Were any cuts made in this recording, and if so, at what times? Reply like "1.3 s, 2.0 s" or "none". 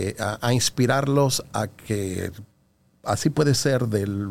none